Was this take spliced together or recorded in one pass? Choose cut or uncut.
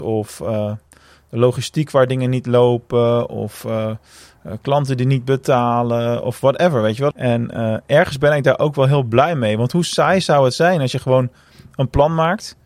cut